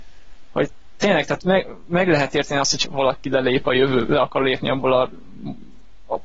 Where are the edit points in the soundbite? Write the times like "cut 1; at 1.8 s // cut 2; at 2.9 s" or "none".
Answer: cut 1; at 2.8 s